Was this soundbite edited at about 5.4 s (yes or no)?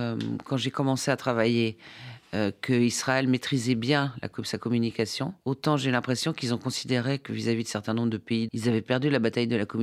yes